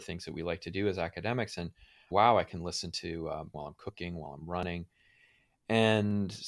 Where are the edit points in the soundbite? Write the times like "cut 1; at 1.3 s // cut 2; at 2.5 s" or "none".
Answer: cut 1; at 2.1 s // cut 2; at 3.5 s